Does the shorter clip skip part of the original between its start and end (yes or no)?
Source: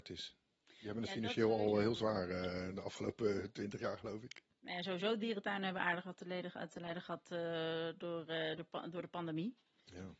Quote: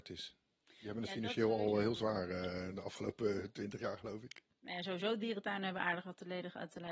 no